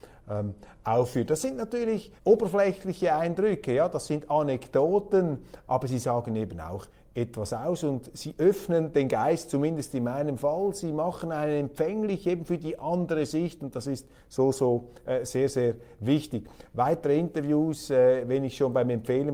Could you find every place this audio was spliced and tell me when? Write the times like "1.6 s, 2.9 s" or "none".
2.2 s